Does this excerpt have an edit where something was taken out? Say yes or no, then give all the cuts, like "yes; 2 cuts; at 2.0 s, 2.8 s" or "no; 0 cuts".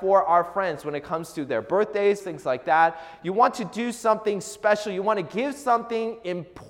yes; 1 cut; at 2.2 s